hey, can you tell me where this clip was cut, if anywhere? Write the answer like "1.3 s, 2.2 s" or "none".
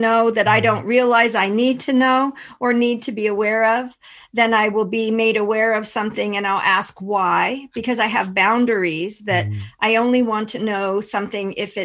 none